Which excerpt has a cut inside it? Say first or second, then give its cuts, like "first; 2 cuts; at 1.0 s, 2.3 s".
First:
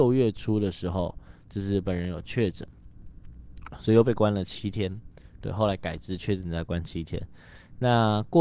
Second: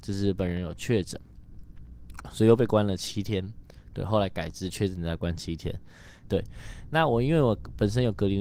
second; 1 cut; at 6.3 s